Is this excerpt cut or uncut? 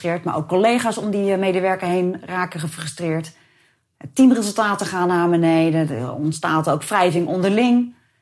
uncut